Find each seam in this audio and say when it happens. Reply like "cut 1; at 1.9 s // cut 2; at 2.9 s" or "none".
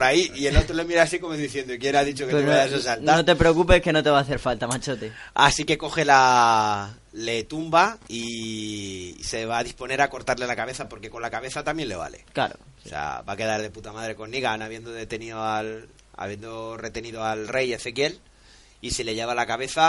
none